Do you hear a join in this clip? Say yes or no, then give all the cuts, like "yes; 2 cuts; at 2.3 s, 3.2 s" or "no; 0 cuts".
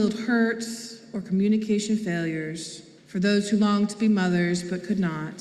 yes; 1 cut; at 3.0 s